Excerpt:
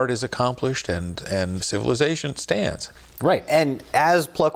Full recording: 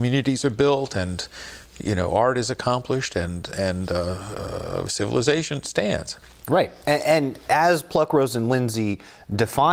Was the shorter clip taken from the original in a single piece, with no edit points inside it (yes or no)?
no